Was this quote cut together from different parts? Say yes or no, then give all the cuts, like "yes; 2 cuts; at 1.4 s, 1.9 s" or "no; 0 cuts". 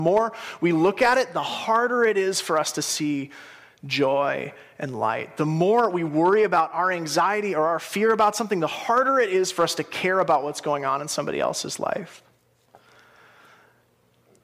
no; 0 cuts